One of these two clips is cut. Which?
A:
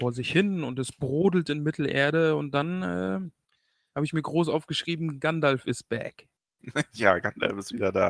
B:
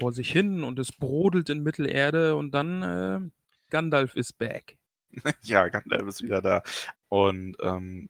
B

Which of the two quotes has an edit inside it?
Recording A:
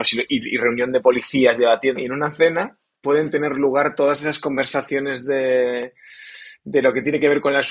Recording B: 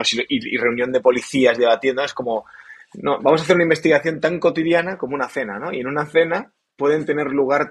A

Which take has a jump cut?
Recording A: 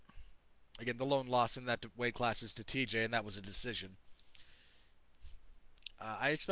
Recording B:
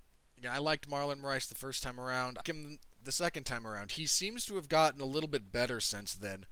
B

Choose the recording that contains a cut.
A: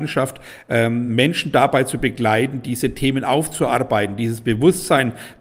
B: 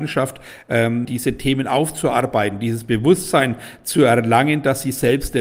B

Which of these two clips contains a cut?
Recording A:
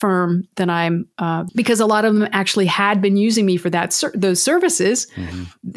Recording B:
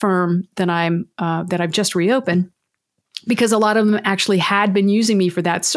A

